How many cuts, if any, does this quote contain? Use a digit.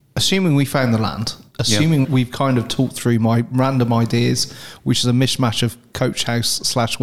1